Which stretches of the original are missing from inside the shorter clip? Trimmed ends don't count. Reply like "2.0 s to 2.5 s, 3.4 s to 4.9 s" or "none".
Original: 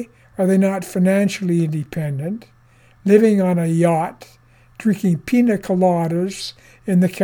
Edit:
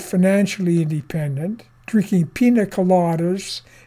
2.6 s to 4.7 s